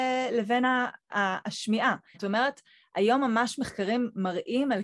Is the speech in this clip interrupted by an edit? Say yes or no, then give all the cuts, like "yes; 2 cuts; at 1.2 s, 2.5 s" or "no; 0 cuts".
yes; 1 cut; at 2.1 s